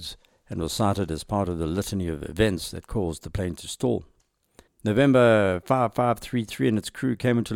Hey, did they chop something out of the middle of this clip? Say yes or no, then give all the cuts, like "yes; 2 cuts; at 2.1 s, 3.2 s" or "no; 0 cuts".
yes; 1 cut; at 4.7 s